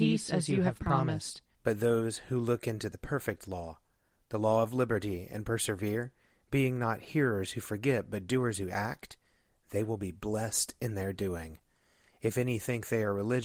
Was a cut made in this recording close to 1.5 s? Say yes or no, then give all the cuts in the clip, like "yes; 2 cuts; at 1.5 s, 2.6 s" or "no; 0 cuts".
yes; 1 cut; at 1.5 s